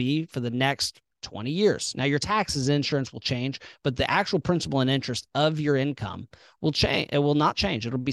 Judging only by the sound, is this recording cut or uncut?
uncut